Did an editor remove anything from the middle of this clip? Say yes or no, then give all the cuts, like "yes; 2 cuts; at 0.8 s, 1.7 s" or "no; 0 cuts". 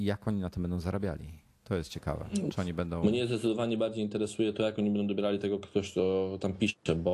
no; 0 cuts